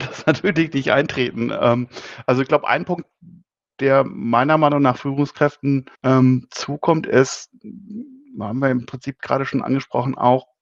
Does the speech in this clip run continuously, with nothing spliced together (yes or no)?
no